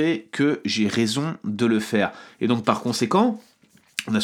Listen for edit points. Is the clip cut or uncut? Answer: cut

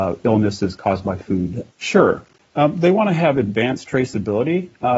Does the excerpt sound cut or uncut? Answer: cut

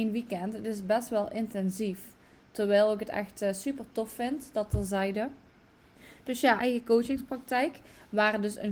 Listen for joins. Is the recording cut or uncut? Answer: cut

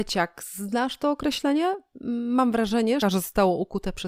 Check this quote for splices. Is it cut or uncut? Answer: cut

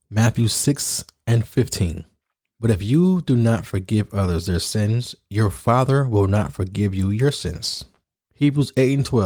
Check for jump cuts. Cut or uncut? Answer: cut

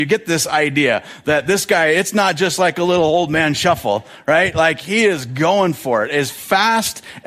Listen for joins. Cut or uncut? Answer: uncut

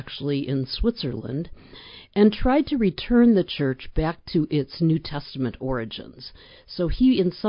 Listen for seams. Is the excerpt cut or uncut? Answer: uncut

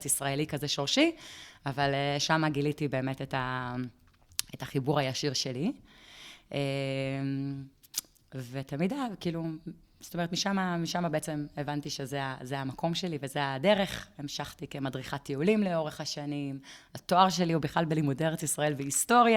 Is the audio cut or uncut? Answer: uncut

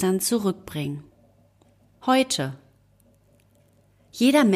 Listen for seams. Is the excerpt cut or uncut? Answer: cut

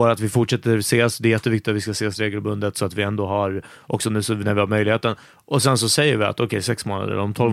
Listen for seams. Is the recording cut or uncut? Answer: uncut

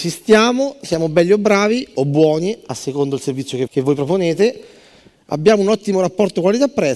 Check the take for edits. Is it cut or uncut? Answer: cut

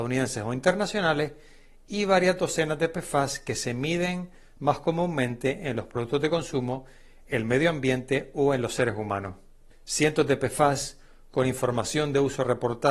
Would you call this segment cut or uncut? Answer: cut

